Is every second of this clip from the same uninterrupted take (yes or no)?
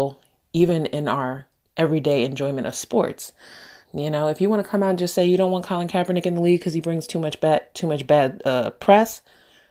no